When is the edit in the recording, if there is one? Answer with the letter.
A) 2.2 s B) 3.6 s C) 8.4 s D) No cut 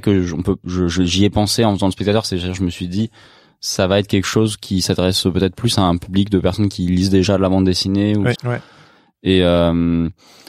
C